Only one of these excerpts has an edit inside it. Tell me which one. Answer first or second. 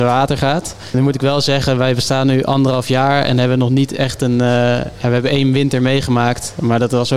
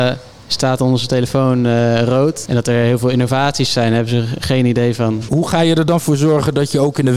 second